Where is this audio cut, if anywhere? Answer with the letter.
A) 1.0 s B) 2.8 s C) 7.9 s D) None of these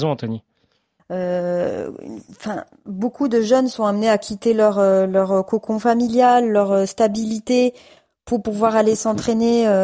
A